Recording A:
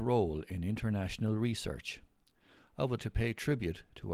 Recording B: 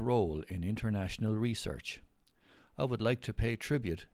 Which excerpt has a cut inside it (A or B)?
A